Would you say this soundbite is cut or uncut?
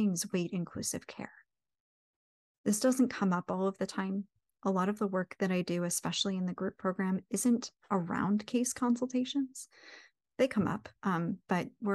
uncut